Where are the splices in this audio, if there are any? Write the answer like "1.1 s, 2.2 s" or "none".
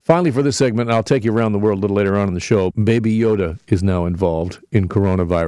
2.7 s